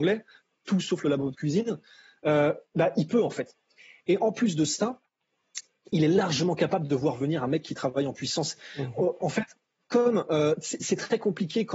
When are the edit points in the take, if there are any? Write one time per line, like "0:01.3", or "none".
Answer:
none